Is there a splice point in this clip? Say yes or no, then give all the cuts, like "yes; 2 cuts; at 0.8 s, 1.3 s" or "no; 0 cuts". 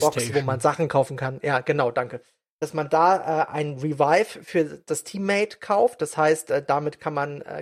no; 0 cuts